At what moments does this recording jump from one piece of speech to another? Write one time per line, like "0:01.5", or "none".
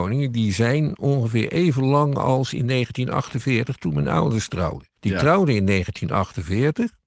0:05.0